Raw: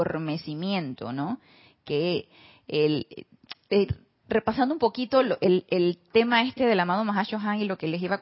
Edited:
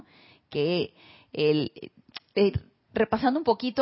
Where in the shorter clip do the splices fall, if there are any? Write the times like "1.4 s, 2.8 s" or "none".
none